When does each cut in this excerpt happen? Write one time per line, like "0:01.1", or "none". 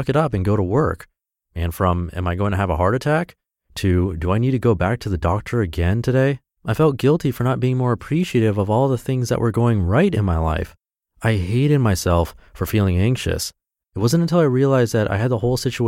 0:06.6
0:13.8